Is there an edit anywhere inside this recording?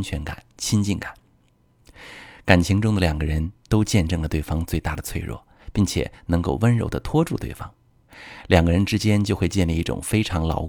no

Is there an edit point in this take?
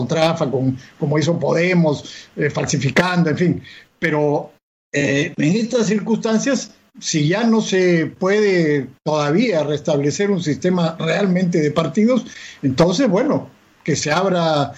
no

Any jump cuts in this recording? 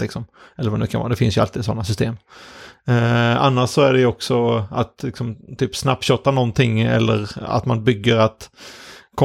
no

